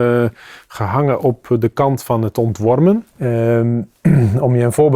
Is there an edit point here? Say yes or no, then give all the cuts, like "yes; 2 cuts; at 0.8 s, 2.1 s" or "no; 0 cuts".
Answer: yes; 1 cut; at 3.1 s